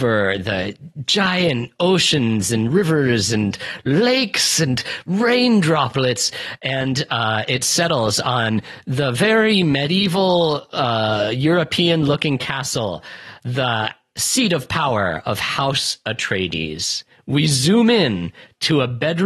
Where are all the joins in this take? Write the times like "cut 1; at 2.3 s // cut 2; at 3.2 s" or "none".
none